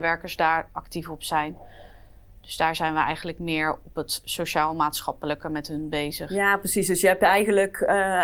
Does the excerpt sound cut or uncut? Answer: uncut